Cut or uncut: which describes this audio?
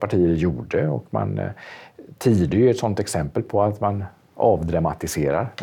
uncut